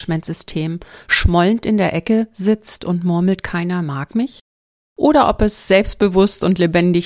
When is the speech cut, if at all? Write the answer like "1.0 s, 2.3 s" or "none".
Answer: none